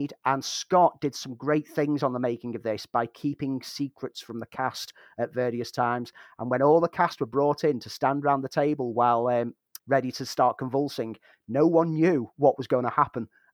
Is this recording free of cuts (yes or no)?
no